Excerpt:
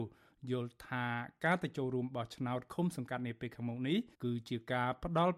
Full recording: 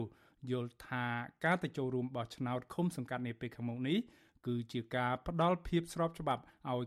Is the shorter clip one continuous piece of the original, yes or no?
no